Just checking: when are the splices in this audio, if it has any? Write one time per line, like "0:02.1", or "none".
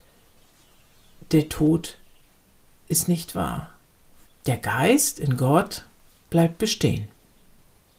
0:04.3